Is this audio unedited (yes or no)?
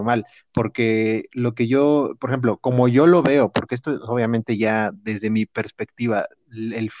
yes